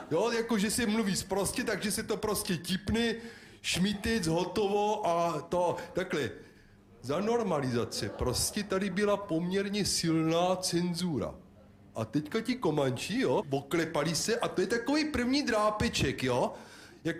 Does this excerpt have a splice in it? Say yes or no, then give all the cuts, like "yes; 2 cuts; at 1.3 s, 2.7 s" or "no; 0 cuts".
yes; 1 cut; at 13.4 s